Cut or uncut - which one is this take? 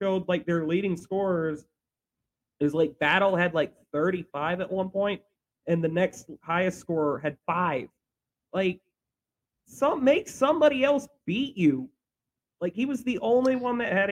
uncut